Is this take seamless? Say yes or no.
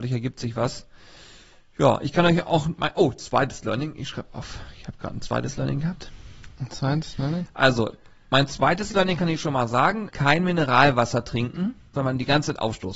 no